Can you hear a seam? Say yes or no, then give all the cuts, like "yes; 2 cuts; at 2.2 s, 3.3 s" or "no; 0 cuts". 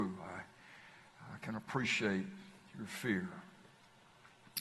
no; 0 cuts